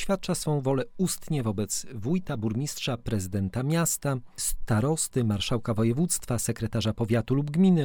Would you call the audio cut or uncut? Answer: uncut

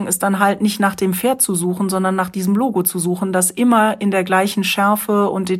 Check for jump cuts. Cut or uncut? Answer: uncut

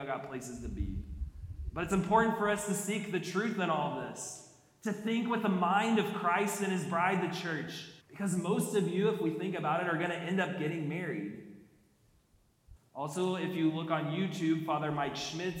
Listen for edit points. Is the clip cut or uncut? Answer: cut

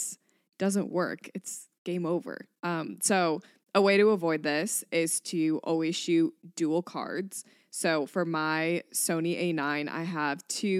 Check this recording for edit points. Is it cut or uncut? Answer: cut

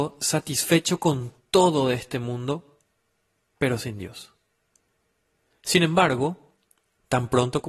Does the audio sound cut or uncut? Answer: uncut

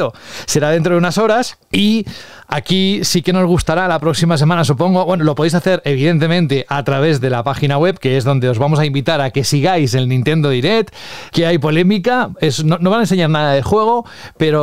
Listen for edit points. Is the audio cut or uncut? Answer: uncut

